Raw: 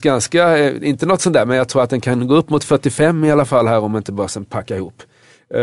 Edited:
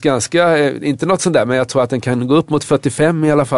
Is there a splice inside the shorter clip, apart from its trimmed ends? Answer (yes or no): no